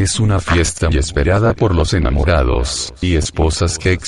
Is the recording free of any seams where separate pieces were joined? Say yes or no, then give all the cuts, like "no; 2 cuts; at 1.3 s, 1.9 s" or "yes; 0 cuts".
no; 1 cut; at 0.9 s